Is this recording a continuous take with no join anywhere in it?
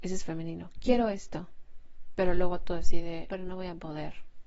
no; 1 cut; at 3.3 s

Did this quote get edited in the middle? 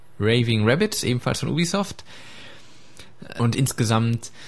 yes; 1 cut; at 3.4 s

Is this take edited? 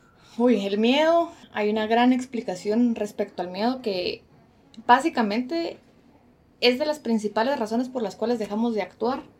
yes; 1 cut; at 1.4 s

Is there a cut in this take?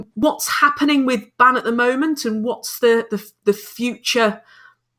no; 0 cuts

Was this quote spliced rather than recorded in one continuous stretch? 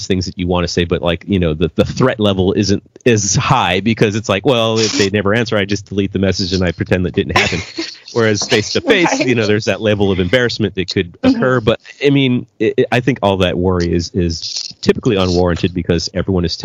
no; 0 cuts

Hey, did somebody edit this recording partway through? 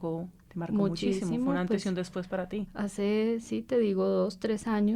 no; 0 cuts

